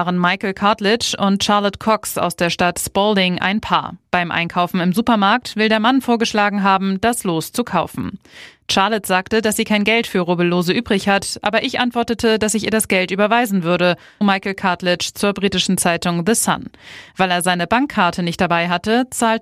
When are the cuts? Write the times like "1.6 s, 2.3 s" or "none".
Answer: 14.2 s